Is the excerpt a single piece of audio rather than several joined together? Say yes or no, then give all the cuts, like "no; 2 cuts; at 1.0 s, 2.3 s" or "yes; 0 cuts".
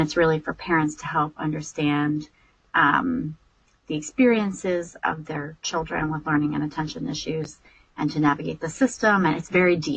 yes; 0 cuts